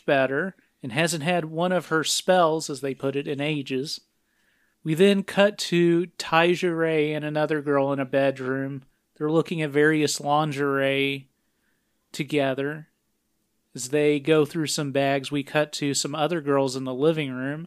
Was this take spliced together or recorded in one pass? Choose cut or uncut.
uncut